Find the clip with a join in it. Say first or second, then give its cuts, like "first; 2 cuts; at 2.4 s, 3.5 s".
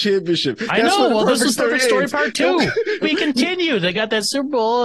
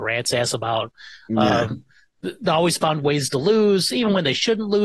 first; 1 cut; at 3.0 s